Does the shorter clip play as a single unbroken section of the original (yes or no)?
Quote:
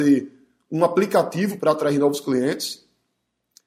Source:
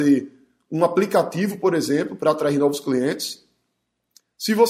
no